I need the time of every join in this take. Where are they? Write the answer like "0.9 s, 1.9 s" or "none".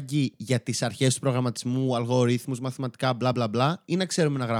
none